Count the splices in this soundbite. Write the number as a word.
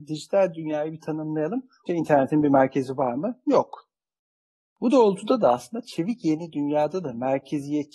one